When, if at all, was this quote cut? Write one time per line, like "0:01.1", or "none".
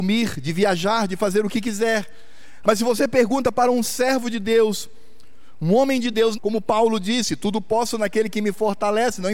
0:02.6
0:06.3